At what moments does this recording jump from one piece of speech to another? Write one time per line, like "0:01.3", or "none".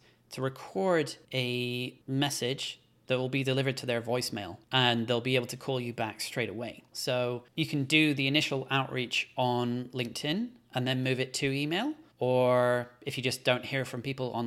0:06.9
0:12.1